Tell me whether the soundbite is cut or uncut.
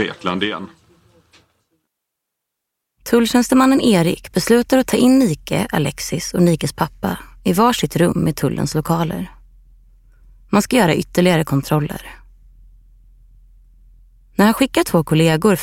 uncut